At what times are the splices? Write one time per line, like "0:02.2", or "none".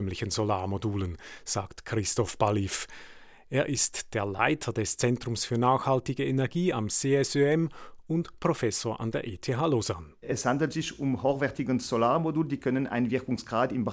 none